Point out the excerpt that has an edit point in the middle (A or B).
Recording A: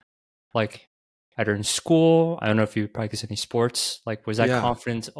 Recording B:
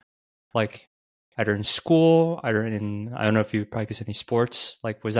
A